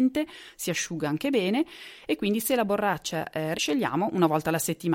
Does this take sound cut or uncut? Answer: cut